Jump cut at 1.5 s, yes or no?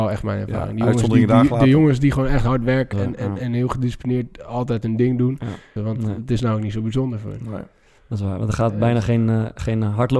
no